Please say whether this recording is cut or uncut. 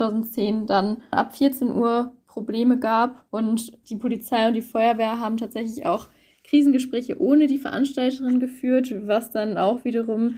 cut